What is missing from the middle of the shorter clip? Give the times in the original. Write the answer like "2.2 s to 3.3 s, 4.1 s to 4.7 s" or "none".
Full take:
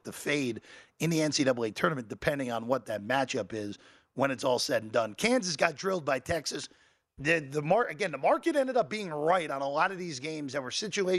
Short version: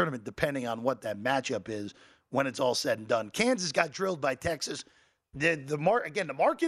none